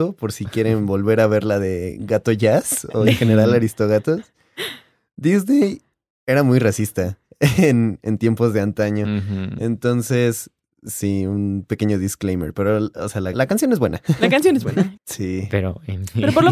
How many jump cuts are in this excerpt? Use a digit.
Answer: 2